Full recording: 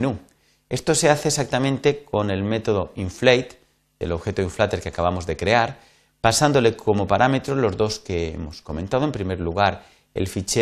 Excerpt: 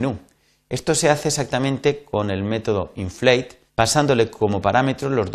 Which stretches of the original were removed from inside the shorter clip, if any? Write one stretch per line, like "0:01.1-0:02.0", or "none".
0:03.7-0:06.1